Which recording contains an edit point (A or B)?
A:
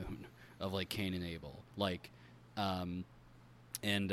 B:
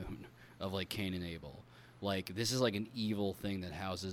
A